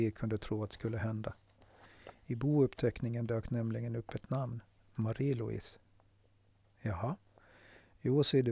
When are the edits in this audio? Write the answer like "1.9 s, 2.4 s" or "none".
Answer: none